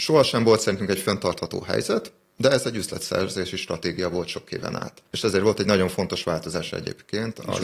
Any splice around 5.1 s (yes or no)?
yes